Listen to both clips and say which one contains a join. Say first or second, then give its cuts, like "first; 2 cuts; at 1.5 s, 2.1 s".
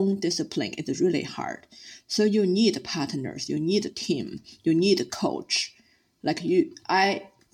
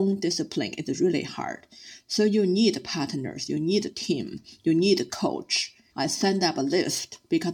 second; 1 cut; at 5.9 s